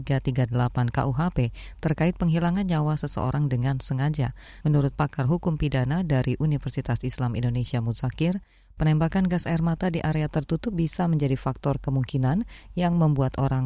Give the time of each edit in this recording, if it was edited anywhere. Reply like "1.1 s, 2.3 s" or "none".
4.6 s